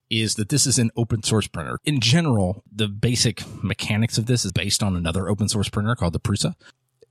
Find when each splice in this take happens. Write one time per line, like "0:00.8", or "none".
0:01.8
0:04.5